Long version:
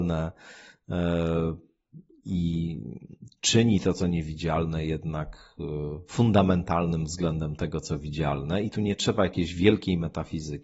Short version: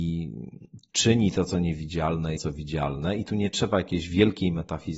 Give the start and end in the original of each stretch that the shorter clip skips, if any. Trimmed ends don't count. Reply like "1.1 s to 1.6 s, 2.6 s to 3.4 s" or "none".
4.8 s to 7.8 s